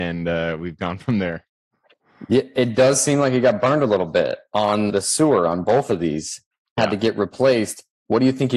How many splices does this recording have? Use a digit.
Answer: 1